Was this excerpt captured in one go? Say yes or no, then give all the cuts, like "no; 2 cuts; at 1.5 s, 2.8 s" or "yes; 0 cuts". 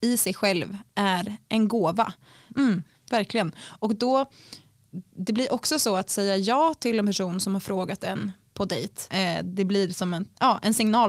no; 2 cuts; at 2.5 s, 9.1 s